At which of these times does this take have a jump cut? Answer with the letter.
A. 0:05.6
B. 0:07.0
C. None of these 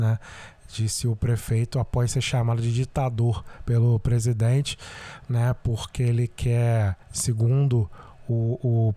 B